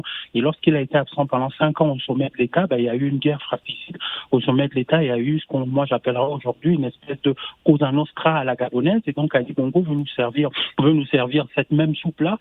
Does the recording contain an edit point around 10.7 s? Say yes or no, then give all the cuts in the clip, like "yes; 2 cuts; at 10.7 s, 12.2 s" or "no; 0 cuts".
yes; 1 cut; at 10.7 s